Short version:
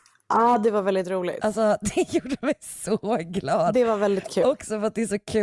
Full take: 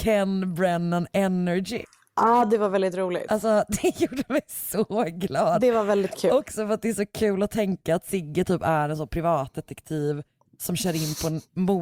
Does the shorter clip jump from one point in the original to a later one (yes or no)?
no